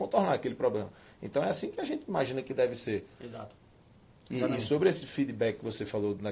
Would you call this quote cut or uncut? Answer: uncut